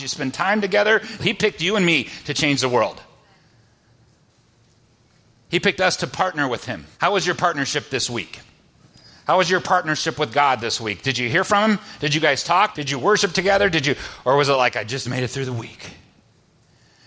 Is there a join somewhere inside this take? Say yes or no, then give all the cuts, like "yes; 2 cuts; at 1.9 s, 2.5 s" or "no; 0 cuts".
yes; 3 cuts; at 1.2 s, 6.9 s, 12.7 s